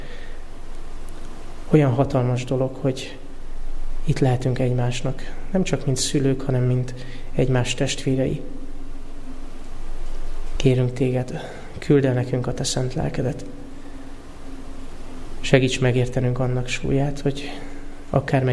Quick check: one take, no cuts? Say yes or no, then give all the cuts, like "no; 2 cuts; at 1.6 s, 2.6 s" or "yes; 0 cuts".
yes; 0 cuts